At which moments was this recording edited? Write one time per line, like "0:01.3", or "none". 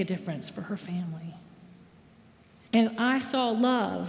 0:02.7